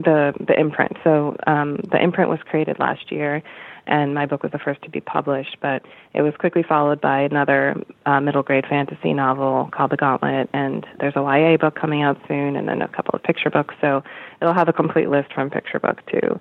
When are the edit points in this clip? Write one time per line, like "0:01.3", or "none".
0:11.0